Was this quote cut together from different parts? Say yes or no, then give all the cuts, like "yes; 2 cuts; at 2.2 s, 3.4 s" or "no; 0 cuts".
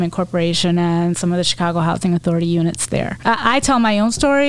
yes; 1 cut; at 3.2 s